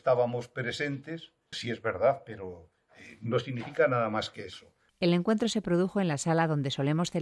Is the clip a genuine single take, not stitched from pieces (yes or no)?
no